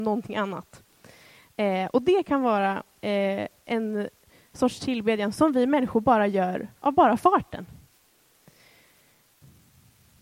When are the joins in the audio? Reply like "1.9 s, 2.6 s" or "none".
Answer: none